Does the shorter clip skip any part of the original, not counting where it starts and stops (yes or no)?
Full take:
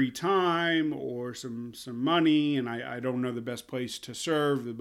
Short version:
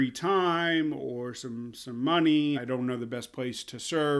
yes